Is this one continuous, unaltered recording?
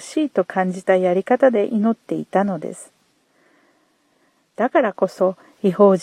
yes; 0 cuts

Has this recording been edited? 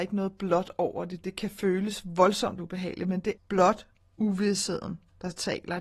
yes; 1 cut; at 3.4 s

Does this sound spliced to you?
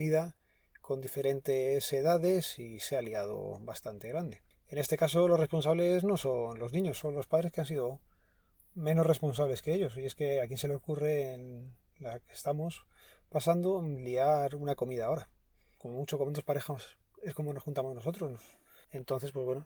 yes; 1 cut; at 15.8 s

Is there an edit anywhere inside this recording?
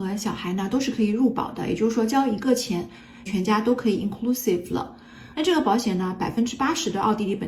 yes; 2 cuts; at 3.3 s, 5.3 s

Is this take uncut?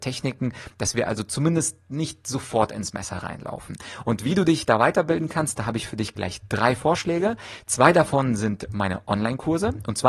yes; 0 cuts

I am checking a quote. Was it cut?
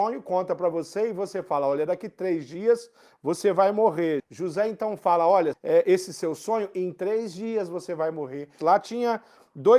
yes; 3 cuts; at 4.2 s, 5.5 s, 8.6 s

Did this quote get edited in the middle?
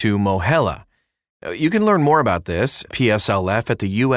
yes; 1 cut; at 2.9 s

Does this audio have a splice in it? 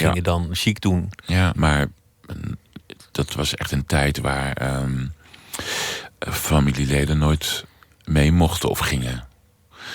yes; 2 cuts; at 1.5 s, 6.3 s

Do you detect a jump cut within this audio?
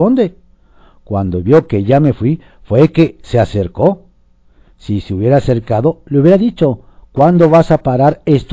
no; 0 cuts

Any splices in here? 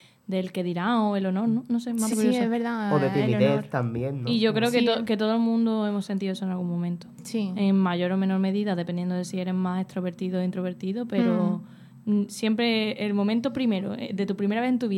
yes; 1 cut; at 2.1 s

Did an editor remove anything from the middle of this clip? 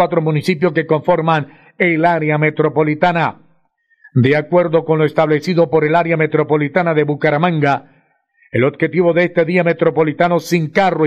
no; 0 cuts

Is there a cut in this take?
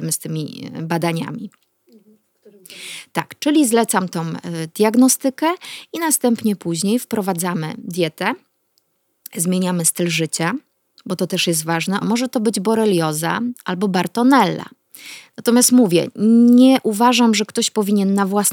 yes; 1 cut; at 12.0 s

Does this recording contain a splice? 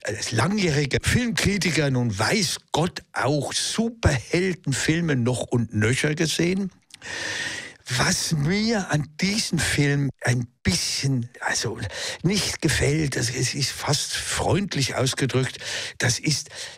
no; 0 cuts

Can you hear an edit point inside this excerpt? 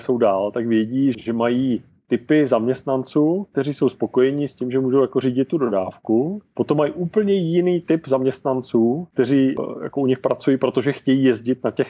no; 0 cuts

